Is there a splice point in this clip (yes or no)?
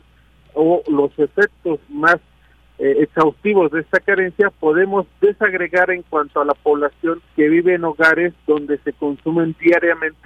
yes